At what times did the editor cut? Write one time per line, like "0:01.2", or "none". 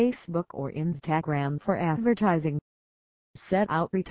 none